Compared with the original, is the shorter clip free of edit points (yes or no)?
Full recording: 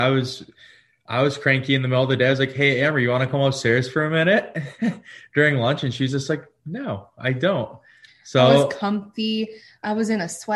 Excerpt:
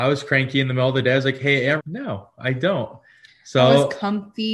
no